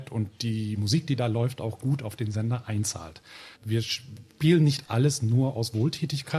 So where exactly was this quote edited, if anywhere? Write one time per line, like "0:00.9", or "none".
0:03.6